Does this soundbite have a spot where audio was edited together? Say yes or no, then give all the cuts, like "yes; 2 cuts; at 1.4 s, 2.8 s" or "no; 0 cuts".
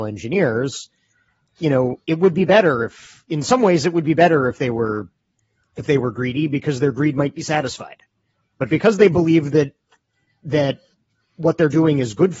no; 0 cuts